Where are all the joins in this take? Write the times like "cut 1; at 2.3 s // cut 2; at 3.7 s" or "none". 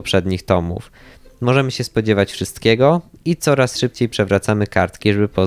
none